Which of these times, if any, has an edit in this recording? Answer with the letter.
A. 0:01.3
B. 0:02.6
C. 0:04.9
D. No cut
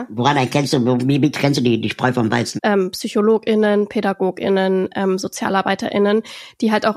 B